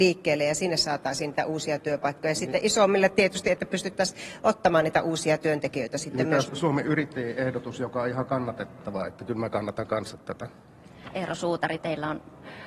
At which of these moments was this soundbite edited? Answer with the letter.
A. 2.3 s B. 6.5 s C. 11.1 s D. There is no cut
B